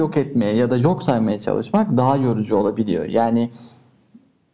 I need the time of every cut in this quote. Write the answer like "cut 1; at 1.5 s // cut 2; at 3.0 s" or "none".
none

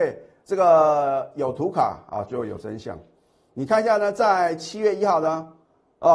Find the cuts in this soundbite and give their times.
none

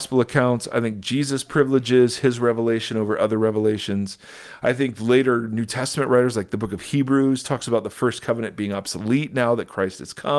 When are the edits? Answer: none

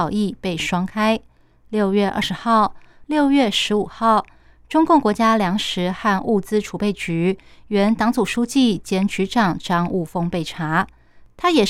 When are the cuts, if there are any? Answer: cut 1; at 3.0 s

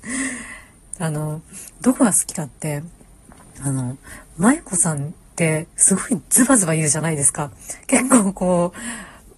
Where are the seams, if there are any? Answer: none

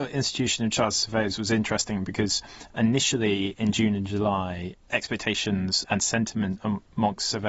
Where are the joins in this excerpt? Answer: cut 1; at 5.8 s

